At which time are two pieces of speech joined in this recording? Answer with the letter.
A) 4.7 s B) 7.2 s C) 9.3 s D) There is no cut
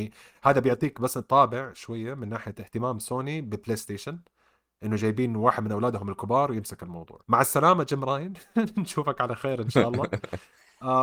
B